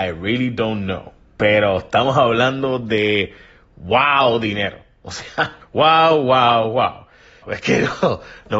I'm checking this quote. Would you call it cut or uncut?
cut